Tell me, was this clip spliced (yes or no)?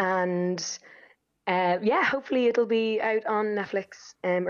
no